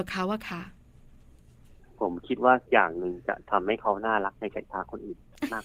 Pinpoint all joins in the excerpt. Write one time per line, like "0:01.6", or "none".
0:02.7